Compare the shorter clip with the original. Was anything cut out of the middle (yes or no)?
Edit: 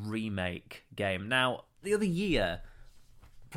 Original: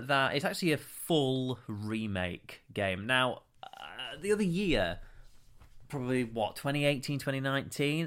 yes